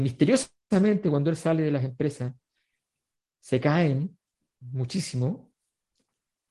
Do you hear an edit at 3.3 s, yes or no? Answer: no